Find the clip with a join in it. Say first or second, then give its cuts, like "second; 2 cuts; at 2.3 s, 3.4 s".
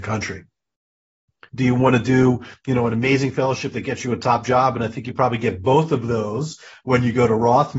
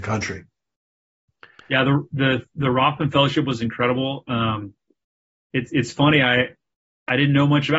first; 1 cut; at 1.5 s